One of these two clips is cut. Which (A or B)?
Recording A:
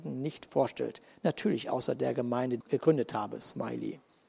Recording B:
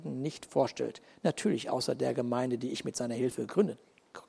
A